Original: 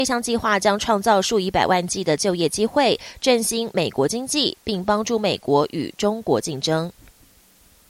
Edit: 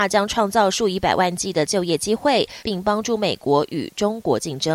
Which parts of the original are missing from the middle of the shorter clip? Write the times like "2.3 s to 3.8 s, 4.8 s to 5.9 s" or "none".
3.1 s to 4.6 s